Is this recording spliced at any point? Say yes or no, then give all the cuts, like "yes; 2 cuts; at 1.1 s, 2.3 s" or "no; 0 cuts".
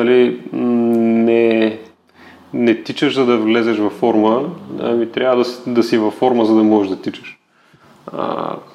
no; 0 cuts